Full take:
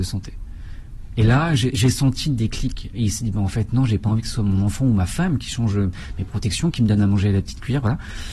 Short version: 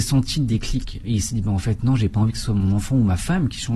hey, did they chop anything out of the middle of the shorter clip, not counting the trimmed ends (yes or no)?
no